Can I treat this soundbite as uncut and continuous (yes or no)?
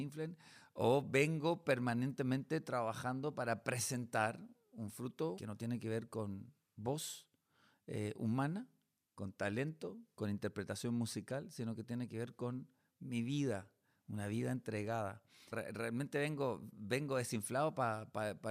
no